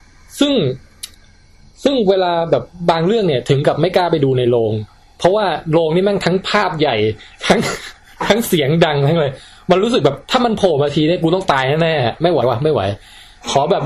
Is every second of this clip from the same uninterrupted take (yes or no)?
no